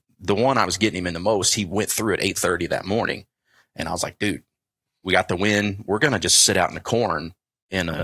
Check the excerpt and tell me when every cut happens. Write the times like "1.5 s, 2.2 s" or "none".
none